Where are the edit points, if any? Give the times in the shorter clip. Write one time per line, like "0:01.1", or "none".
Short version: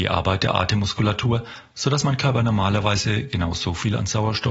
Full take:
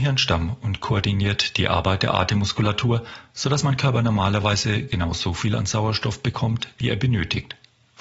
none